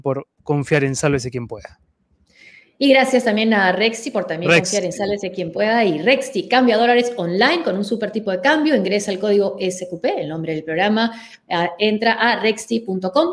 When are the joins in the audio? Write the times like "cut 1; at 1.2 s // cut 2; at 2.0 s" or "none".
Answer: none